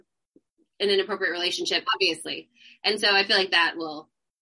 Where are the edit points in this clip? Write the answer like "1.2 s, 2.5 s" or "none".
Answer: 1.8 s